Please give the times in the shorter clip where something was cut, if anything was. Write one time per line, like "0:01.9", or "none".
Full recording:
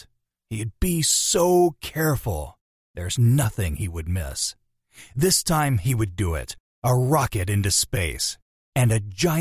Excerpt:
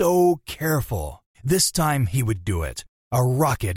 0:01.3

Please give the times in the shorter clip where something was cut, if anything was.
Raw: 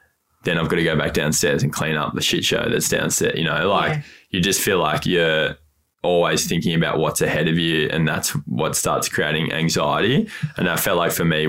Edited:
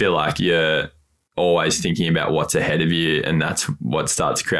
none

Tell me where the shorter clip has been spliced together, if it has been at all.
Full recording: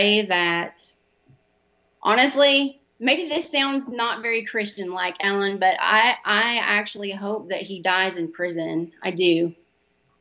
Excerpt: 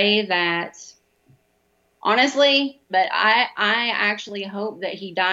0:02.9

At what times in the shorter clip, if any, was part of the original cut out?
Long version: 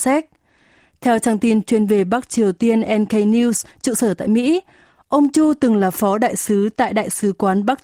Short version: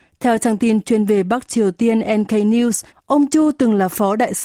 0:02.9

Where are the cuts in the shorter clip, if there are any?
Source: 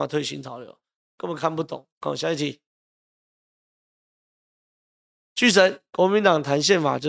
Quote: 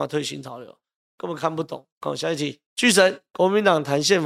0:02.7

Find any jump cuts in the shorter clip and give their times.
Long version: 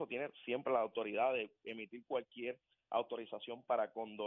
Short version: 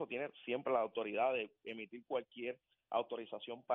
none

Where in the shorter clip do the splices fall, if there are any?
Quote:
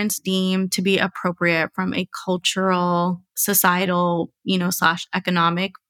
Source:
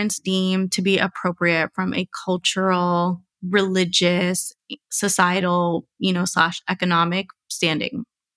0:03.3

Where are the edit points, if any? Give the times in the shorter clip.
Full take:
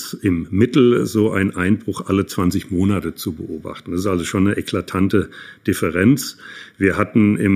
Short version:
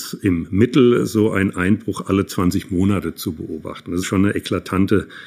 0:04.0

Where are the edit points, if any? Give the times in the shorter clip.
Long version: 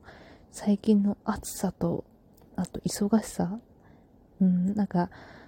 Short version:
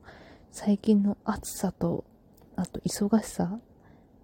none

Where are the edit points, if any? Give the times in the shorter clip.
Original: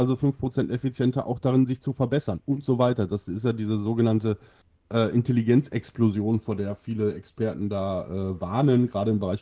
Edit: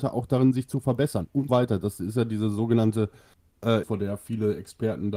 0:01.5
0:03.8

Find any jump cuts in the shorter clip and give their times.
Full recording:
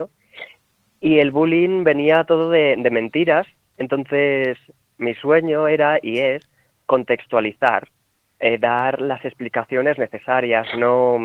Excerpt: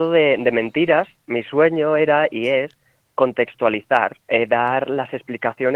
0:01.2
0:04.2

